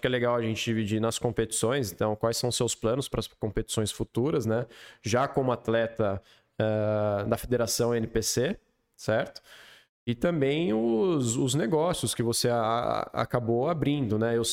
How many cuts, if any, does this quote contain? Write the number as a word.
zero